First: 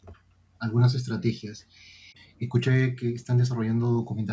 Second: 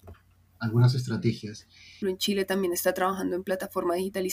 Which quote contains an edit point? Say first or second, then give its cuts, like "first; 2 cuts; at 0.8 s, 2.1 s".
second; 1 cut; at 2.0 s